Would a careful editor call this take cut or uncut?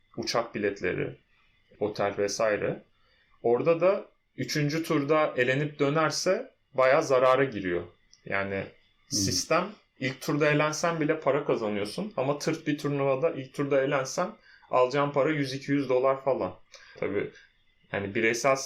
cut